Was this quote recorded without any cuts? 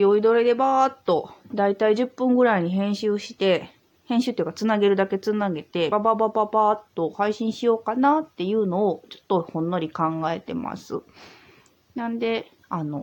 no; 1 cut; at 5.9 s

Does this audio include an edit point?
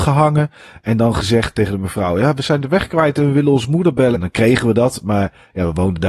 yes; 2 cuts; at 1.5 s, 4.1 s

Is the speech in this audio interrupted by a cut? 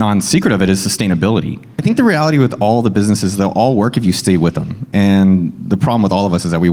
no; 0 cuts

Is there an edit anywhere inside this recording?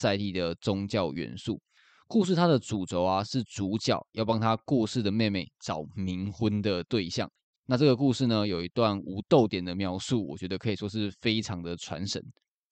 yes; 1 cut; at 7.5 s

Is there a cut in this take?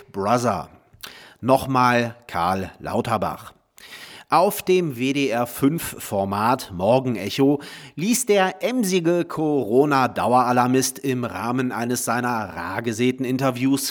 no; 0 cuts

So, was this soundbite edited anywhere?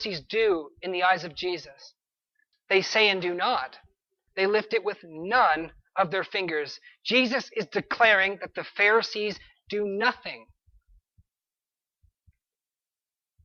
yes; 2 cuts; at 2.5 s, 4.3 s

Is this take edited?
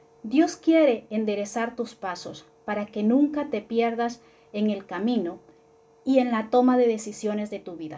no; 0 cuts

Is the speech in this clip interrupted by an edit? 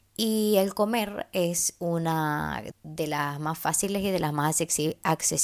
yes; 1 cut; at 2.7 s

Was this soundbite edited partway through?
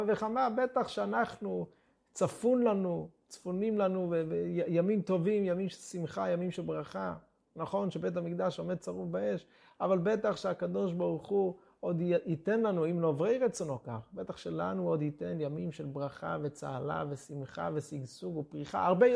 no; 0 cuts

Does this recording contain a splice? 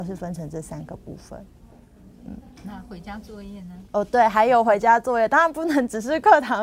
yes; 1 cut; at 3.9 s

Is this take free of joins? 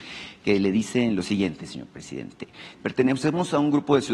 no; 1 cut; at 2.7 s

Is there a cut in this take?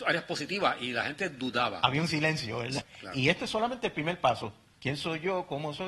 yes; 1 cut; at 2.8 s

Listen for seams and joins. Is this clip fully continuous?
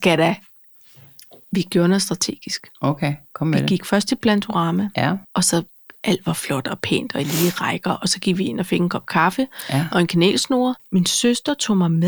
no; 2 cuts; at 5.2 s, 10.8 s

